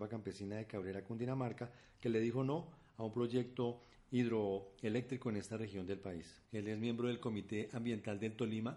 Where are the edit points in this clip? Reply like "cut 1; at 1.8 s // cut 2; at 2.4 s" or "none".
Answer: cut 1; at 6.4 s